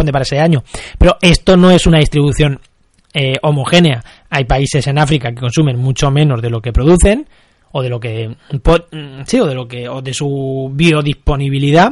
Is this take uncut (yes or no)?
yes